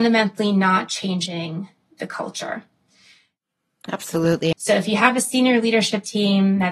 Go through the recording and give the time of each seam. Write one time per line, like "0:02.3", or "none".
0:04.5